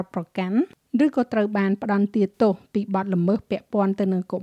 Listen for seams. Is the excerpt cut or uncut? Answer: uncut